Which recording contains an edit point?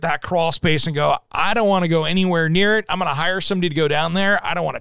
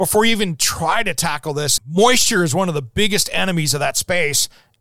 second; 1 cut; at 1.8 s

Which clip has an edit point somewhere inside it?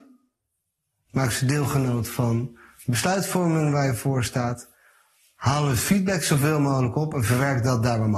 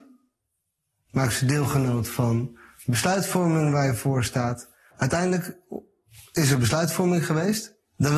second; 1 cut; at 4.9 s

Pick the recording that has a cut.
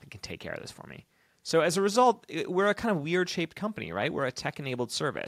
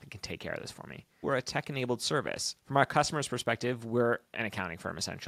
second; 2 cuts; at 1.2 s, 2.6 s

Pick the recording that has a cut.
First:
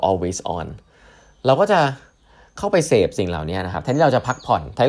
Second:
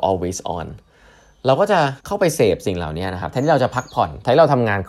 second; 1 cut; at 2.0 s

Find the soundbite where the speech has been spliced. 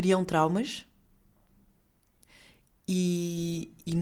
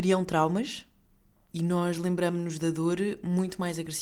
second; 1 cut; at 1.5 s

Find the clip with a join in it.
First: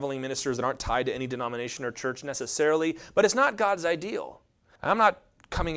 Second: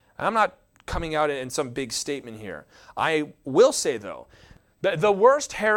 first; 1 cut; at 4.8 s

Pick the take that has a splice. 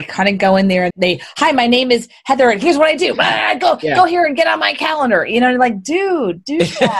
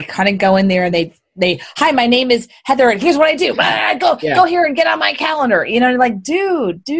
first; 1 cut; at 0.9 s

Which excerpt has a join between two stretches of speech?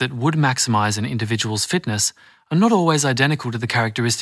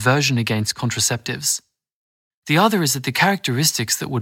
second; 1 cut; at 2.3 s

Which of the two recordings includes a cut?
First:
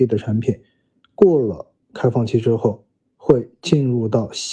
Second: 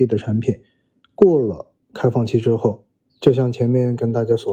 second; 1 cut; at 3.1 s

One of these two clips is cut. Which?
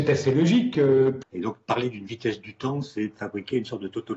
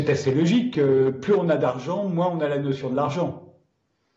first; 1 cut; at 1.2 s

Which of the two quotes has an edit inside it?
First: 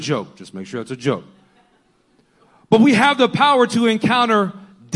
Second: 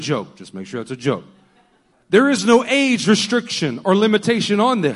second; 1 cut; at 1.9 s

